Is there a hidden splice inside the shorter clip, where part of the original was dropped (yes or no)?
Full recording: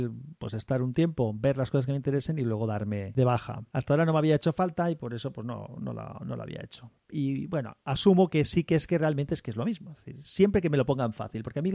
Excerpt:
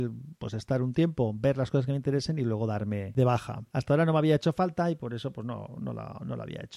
no